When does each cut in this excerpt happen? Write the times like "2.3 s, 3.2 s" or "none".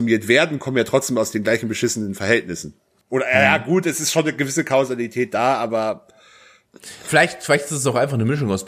3.0 s